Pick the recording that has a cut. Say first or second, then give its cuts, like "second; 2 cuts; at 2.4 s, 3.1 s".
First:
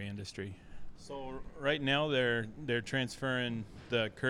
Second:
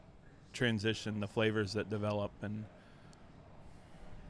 first; 1 cut; at 1.0 s